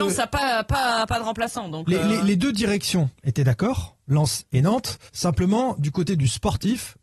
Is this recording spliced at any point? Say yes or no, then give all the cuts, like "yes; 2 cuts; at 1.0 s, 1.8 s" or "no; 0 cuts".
yes; 1 cut; at 5.1 s